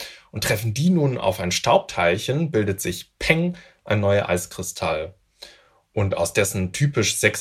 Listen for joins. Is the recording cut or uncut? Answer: uncut